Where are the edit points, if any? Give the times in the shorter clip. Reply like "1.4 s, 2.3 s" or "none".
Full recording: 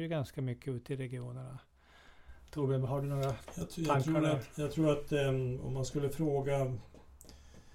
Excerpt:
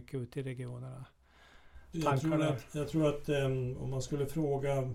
1.9 s